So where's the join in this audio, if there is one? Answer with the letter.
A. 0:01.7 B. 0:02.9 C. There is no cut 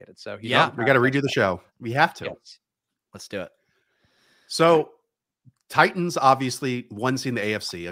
A